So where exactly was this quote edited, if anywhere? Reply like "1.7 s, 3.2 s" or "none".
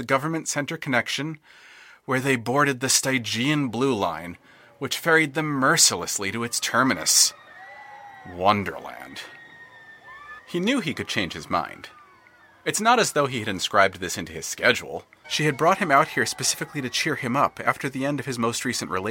10.4 s, 15.2 s